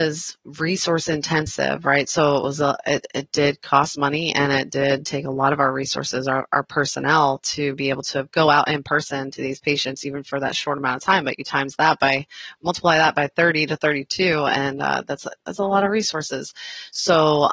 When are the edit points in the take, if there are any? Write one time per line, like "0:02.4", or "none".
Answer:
none